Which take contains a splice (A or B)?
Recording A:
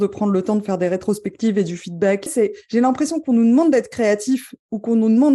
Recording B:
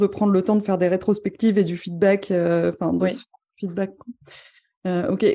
A